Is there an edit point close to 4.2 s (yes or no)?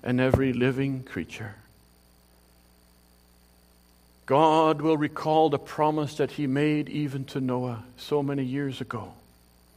yes